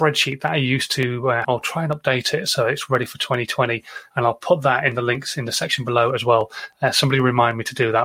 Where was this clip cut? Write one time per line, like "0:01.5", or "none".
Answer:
0:01.4